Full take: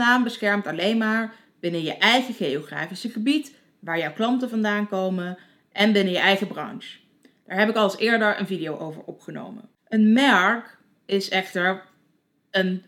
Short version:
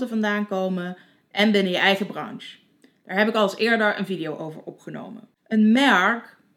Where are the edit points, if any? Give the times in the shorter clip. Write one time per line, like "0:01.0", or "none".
none